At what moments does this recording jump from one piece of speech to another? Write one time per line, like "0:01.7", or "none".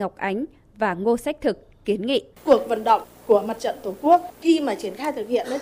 0:02.3